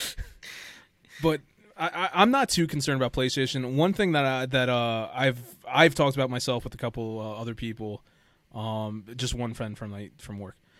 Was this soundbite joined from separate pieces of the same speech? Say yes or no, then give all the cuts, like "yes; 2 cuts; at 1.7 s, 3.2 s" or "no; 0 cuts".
no; 0 cuts